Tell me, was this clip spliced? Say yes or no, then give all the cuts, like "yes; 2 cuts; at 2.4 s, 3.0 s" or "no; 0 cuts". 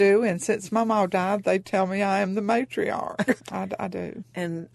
yes; 1 cut; at 3.4 s